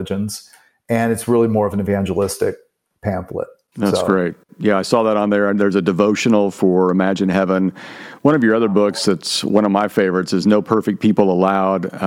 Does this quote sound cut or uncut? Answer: uncut